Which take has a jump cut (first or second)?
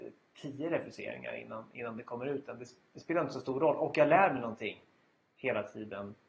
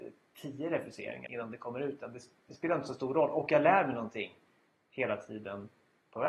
second